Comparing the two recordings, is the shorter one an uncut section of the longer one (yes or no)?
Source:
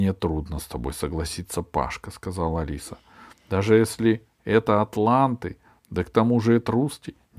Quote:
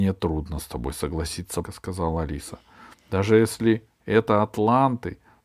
no